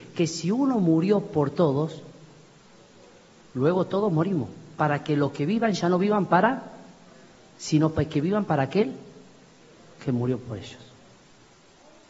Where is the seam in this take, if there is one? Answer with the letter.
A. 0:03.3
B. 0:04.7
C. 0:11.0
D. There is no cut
D